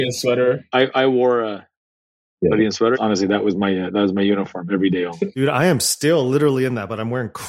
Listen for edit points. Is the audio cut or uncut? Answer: cut